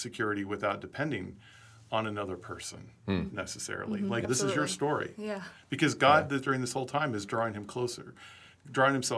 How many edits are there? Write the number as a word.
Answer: one